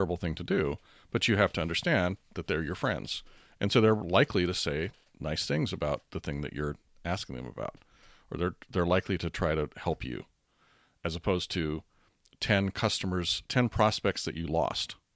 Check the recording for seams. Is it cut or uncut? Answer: uncut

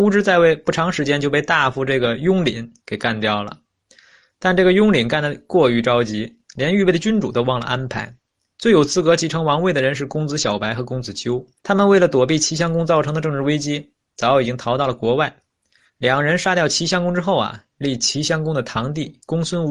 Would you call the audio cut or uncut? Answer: cut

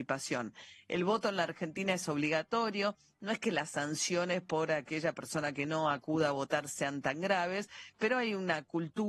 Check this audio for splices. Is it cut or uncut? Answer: uncut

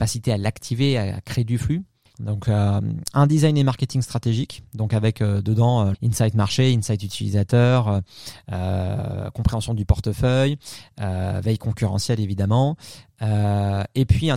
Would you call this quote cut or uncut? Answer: cut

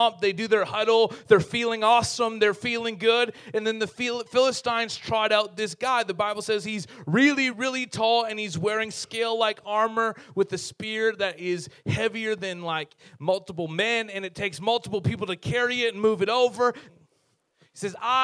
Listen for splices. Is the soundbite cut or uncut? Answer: cut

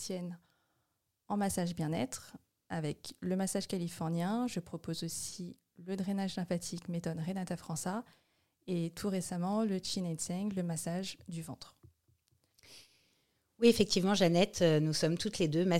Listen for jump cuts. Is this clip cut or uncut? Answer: uncut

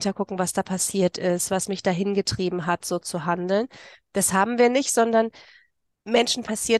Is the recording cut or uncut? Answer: uncut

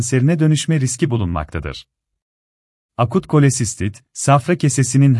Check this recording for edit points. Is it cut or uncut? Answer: cut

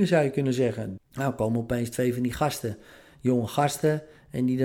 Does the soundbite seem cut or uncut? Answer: cut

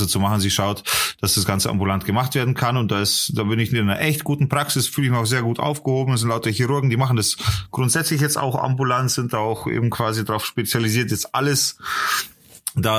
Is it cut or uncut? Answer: uncut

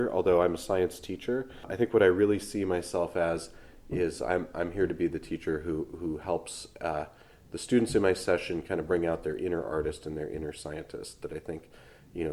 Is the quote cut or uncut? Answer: uncut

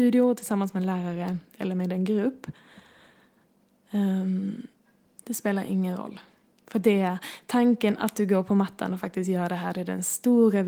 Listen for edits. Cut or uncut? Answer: cut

